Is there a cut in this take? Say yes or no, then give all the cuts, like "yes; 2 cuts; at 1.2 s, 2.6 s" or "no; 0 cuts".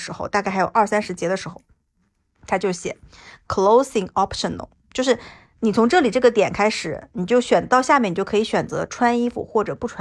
no; 0 cuts